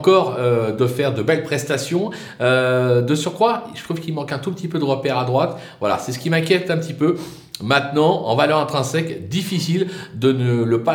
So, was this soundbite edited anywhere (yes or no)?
no